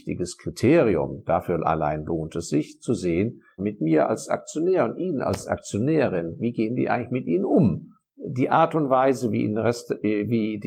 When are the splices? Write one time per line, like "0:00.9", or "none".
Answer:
0:03.6
0:08.1